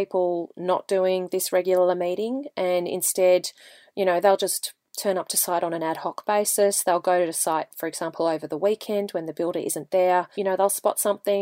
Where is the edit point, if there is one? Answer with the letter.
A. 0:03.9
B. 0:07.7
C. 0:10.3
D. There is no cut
C